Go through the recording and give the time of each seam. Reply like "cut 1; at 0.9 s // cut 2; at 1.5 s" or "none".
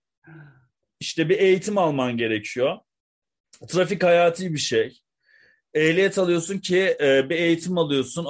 cut 1; at 0.9 s